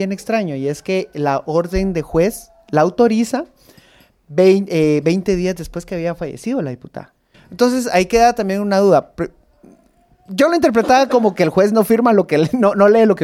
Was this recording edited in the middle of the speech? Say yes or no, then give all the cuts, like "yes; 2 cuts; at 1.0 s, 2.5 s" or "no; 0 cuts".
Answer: yes; 1 cut; at 7.3 s